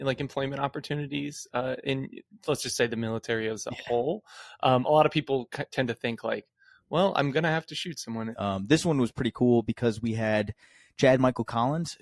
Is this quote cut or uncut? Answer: cut